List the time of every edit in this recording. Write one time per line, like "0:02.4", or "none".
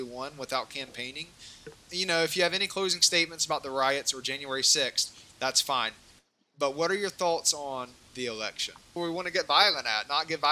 0:01.9
0:09.0